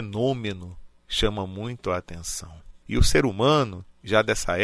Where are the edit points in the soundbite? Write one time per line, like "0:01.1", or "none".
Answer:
0:02.8